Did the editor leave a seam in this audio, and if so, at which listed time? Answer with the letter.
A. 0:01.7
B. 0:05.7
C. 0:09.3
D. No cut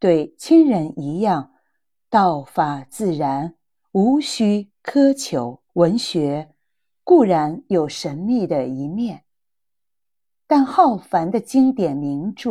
B